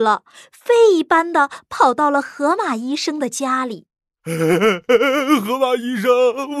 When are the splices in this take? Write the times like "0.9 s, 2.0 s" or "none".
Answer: none